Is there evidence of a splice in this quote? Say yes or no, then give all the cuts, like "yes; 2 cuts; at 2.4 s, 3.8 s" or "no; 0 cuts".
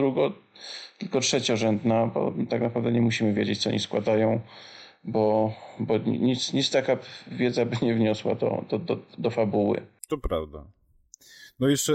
no; 0 cuts